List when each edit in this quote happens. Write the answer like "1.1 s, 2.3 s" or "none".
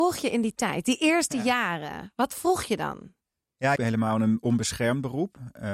3.8 s